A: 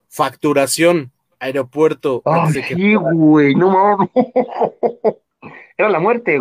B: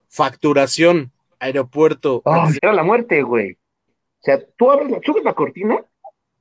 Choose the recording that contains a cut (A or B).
B